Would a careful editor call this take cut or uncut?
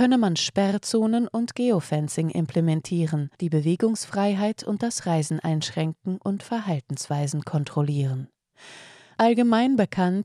cut